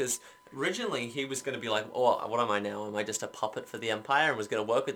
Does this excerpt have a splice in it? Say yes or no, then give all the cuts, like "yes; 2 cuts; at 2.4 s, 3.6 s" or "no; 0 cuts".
no; 0 cuts